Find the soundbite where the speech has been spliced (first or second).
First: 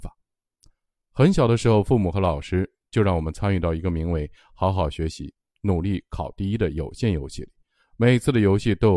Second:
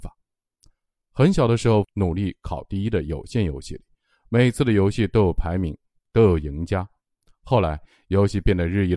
second